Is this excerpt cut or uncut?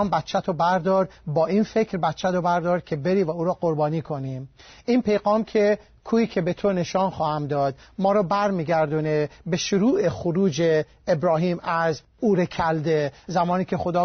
cut